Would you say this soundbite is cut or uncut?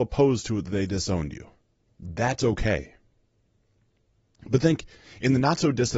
uncut